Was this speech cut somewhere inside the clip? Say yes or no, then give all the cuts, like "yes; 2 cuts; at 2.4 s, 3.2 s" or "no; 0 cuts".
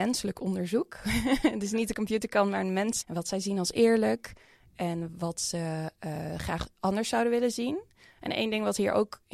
yes; 1 cut; at 3.0 s